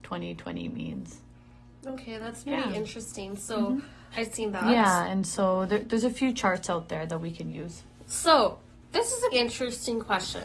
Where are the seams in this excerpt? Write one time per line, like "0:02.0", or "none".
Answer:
0:04.1
0:08.1
0:09.3